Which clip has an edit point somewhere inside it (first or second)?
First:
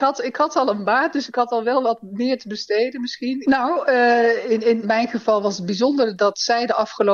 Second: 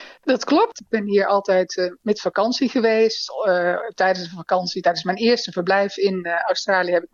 first